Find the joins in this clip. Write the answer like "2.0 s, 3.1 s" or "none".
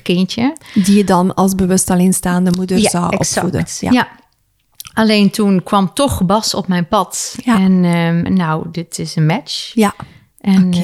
8.3 s